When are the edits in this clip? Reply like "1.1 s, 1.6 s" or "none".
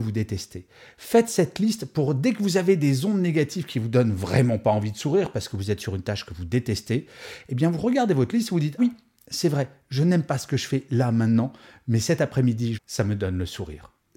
8.8 s, 12.7 s